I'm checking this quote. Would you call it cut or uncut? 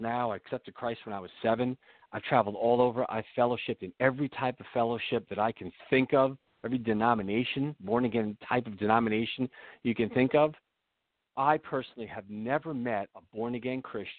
cut